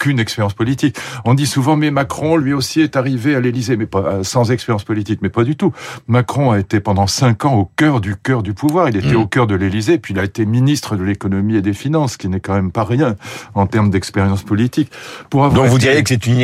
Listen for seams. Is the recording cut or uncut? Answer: uncut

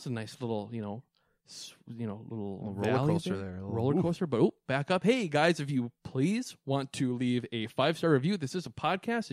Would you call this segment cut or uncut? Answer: uncut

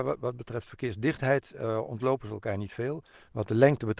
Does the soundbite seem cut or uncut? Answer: uncut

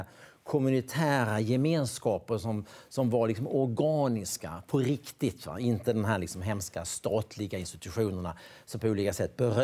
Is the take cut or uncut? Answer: uncut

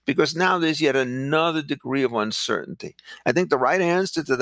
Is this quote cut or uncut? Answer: cut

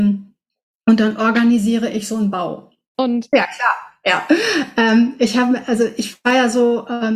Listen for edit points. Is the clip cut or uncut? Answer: cut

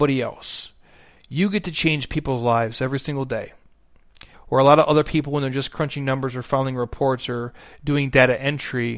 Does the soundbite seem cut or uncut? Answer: cut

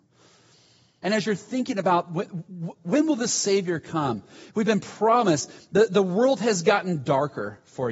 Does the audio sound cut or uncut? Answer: cut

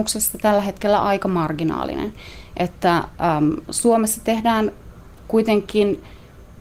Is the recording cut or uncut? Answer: uncut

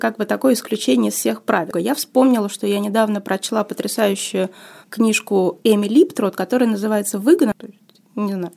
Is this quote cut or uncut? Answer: cut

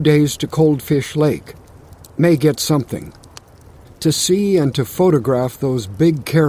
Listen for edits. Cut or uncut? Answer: cut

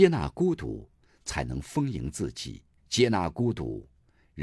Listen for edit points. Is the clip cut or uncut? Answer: cut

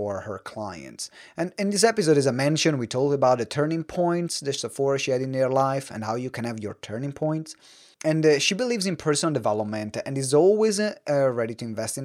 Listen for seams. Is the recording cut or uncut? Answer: cut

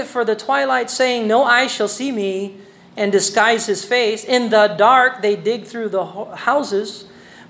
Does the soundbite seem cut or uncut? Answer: uncut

